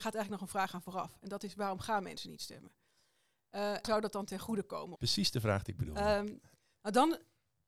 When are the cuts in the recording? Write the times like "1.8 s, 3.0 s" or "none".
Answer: 3.8 s, 5.0 s